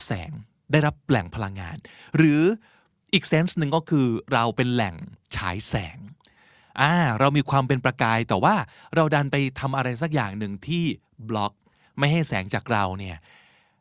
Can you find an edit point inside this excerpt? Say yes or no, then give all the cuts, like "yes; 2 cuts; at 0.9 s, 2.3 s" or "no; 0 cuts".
no; 0 cuts